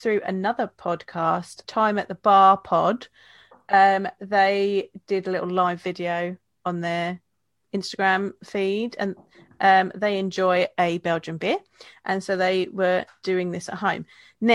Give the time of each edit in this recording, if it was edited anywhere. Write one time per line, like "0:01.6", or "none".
0:01.6